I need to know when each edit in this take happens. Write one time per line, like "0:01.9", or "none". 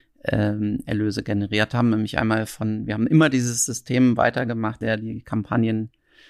0:04.8